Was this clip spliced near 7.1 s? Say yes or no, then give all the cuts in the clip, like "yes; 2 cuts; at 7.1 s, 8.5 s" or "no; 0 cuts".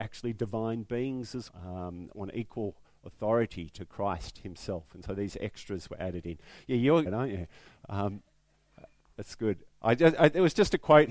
yes; 2 cuts; at 1.5 s, 7.1 s